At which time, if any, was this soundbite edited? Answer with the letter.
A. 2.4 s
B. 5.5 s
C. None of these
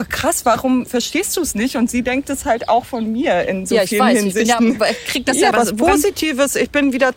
B